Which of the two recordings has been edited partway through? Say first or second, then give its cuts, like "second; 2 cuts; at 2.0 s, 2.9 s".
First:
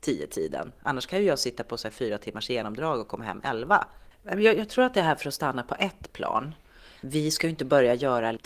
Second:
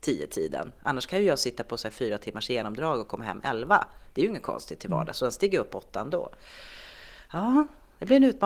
first; 2 cuts; at 4.1 s, 7.0 s